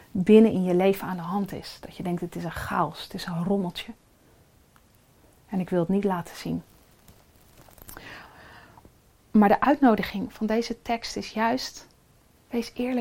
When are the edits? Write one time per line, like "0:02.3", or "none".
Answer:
none